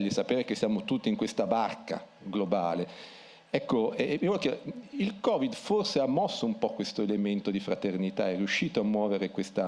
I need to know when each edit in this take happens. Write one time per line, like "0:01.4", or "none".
none